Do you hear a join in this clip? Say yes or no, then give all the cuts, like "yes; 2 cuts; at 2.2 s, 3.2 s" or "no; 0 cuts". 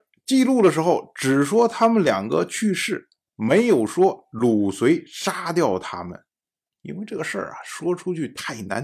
yes; 1 cut; at 6.7 s